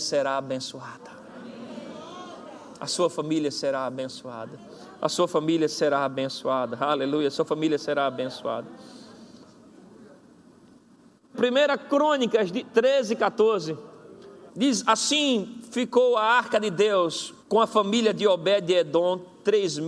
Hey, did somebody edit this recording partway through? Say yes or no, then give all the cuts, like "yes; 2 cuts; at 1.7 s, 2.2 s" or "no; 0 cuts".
yes; 3 cuts; at 11.3 s, 14.5 s, 17.4 s